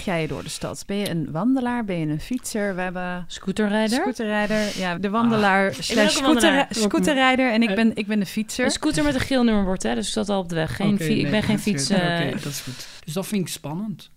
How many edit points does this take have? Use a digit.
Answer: 2